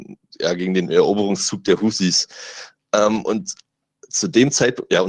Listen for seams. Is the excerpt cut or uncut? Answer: uncut